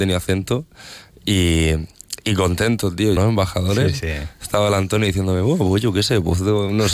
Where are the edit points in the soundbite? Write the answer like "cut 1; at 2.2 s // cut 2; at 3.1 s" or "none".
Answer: cut 1; at 3.2 s